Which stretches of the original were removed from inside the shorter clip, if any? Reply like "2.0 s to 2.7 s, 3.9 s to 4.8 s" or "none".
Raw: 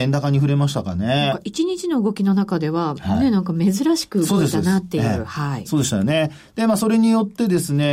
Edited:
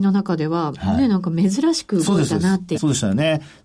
5.0 s to 5.6 s